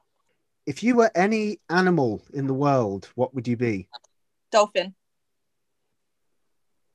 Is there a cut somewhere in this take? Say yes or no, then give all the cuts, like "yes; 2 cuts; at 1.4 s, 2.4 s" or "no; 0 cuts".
no; 0 cuts